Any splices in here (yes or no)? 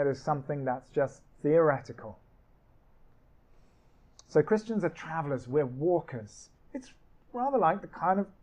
yes